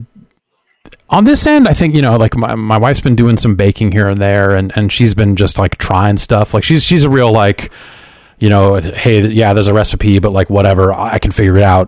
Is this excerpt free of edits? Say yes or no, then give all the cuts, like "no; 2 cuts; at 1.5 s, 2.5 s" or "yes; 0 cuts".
yes; 0 cuts